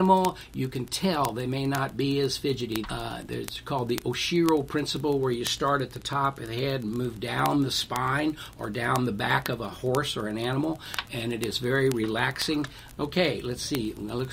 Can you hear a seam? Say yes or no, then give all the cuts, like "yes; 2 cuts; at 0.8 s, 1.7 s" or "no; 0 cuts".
yes; 2 cuts; at 2.8 s, 13.0 s